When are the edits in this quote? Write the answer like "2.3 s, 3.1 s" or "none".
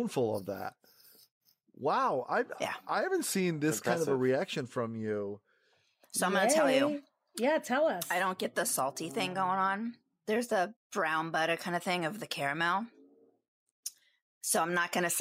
none